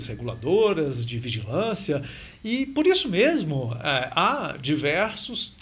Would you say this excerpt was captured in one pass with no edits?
yes; 0 cuts

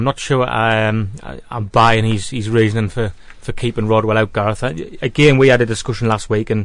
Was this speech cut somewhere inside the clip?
no; 0 cuts

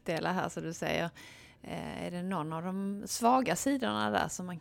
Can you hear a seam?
no; 0 cuts

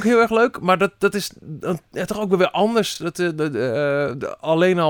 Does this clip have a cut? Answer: no; 0 cuts

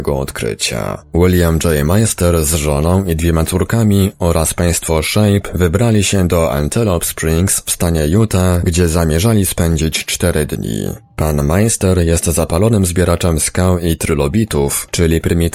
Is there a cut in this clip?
no; 0 cuts

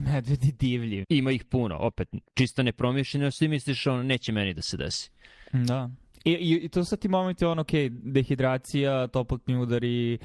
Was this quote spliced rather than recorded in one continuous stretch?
yes; 1 cut; at 1.0 s

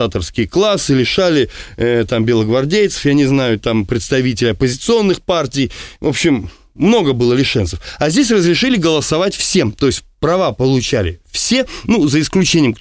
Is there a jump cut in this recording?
no; 0 cuts

